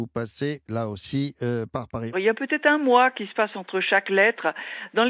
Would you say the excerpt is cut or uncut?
cut